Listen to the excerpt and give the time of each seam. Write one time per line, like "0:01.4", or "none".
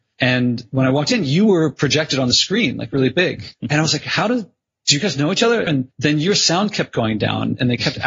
0:05.7